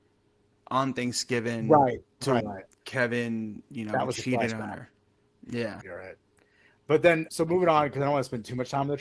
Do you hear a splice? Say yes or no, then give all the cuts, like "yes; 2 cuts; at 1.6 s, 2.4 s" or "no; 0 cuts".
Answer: yes; 3 cuts; at 2.4 s, 5.8 s, 7.3 s